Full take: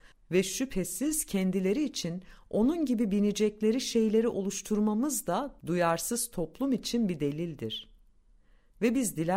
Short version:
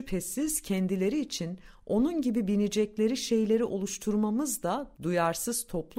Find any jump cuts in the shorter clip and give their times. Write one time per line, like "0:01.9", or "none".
none